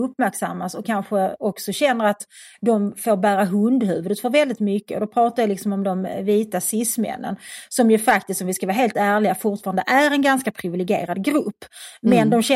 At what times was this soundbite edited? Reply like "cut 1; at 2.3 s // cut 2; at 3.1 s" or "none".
none